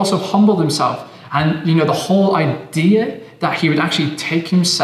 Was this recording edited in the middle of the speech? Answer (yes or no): yes